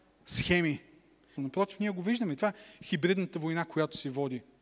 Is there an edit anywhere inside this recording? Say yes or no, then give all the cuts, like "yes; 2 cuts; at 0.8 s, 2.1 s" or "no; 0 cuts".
yes; 1 cut; at 1.4 s